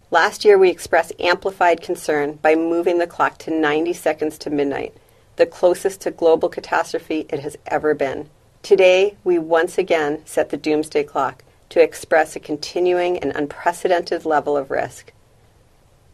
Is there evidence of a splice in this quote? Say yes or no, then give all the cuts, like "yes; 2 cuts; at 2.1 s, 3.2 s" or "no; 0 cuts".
yes; 1 cut; at 8.5 s